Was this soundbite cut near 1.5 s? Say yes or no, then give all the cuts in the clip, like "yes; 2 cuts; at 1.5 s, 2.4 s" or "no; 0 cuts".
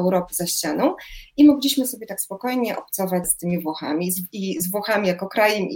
no; 1 cut; at 3.2 s